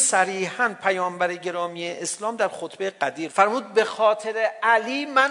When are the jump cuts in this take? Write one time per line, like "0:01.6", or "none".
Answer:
0:03.3